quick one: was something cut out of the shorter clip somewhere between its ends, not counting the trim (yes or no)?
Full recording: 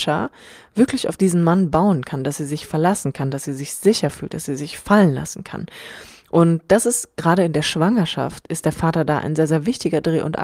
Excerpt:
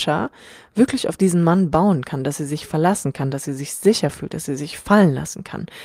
no